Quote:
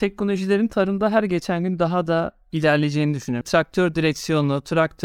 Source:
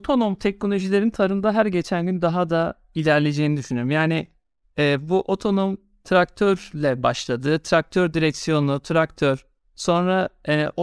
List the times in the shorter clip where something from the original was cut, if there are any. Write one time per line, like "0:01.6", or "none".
0:03.4